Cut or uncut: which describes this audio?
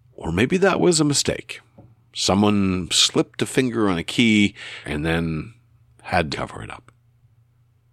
cut